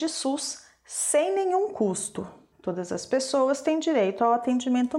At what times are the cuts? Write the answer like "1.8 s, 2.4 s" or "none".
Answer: 2.5 s